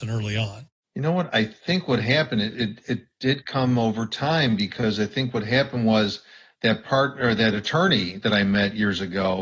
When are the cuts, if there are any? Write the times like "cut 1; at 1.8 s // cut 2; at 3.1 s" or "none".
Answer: none